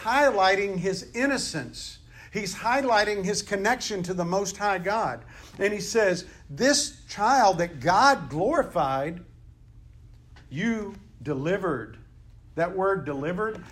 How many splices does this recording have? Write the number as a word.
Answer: zero